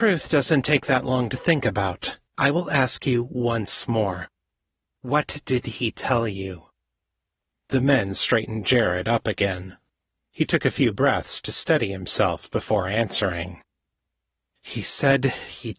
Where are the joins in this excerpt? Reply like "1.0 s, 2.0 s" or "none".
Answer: 2.3 s